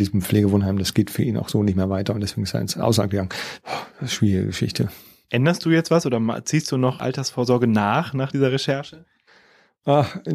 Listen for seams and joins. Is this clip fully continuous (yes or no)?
yes